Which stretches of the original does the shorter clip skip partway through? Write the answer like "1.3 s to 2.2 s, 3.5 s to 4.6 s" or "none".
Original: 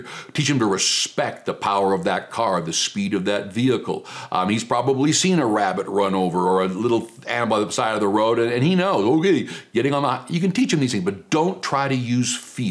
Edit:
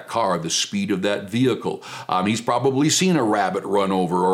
none